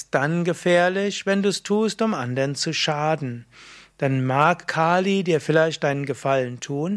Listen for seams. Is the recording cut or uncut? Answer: uncut